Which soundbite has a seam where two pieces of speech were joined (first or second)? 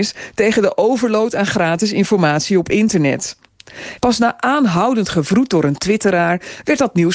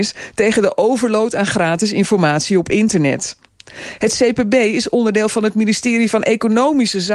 first